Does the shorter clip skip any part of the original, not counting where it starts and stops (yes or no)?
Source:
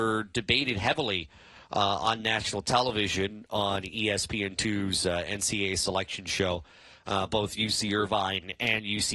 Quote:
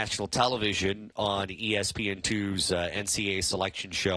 no